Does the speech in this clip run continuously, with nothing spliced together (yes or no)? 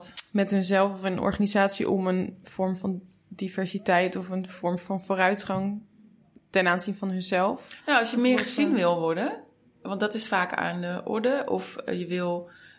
yes